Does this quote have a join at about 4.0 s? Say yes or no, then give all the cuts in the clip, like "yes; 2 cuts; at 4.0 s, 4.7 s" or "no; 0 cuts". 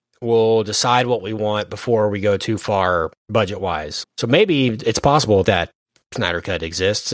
yes; 2 cuts; at 4.0 s, 5.4 s